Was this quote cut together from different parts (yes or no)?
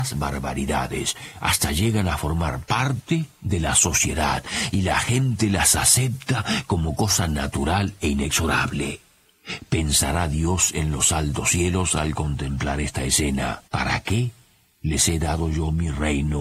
yes